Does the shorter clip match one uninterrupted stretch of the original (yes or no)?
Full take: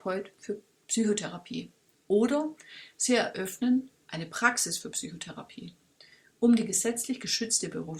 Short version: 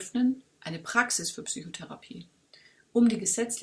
yes